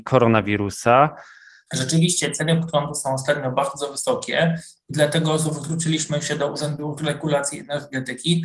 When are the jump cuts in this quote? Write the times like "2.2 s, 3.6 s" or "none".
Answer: 1.7 s